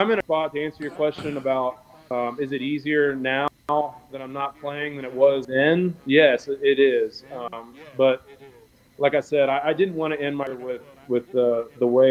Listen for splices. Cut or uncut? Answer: uncut